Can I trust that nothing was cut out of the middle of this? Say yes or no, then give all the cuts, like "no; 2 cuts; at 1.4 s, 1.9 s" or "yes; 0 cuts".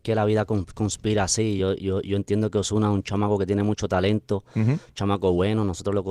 yes; 0 cuts